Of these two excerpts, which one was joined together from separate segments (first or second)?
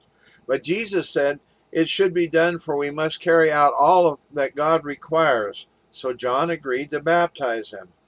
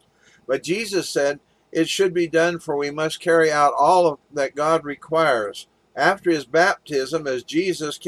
second